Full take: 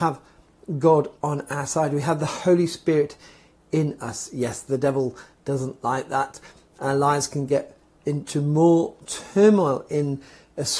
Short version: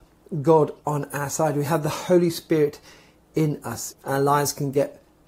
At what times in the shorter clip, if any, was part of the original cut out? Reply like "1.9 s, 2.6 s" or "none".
3.9 s

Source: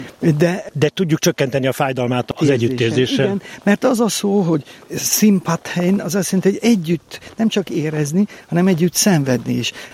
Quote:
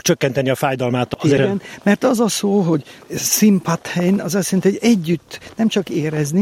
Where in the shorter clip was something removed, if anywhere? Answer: 1.4 s

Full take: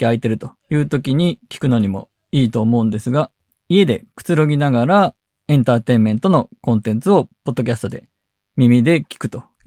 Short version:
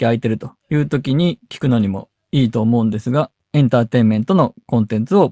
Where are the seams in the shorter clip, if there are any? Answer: 3.4 s

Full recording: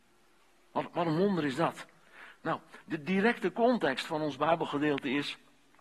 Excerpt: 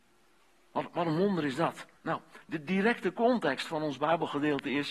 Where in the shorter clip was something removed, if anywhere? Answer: 2.0 s

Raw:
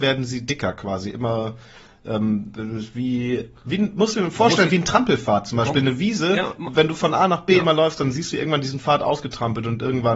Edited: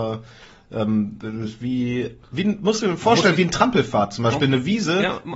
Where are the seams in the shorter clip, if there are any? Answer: none

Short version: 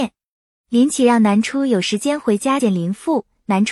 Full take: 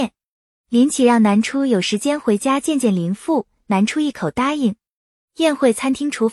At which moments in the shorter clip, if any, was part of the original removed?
2.6 s

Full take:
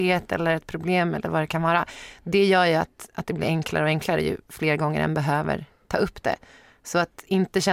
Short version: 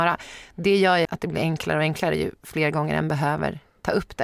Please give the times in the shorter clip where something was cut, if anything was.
1.0 s

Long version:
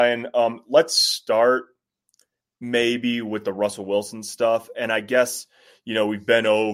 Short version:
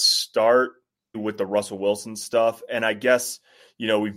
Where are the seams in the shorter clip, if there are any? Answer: 1.1 s

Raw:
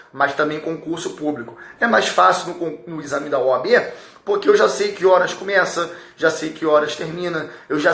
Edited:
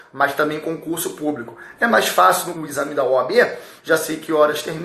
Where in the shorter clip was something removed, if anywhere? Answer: 2.5 s, 3.8 s

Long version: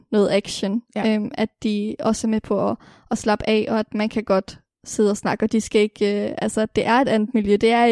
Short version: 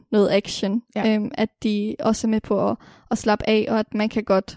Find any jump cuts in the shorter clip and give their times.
none

